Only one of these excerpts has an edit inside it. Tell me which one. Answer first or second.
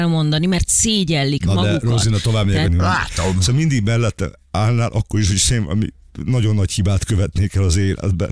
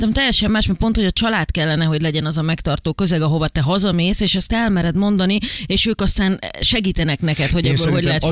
first